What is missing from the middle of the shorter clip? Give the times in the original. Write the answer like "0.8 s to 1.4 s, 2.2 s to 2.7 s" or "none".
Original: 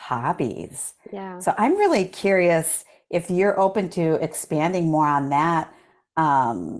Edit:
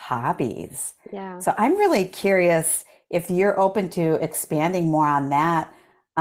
none